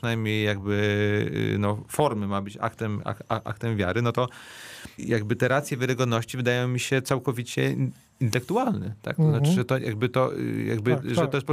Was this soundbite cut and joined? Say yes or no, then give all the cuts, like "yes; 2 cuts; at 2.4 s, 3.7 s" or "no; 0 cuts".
no; 0 cuts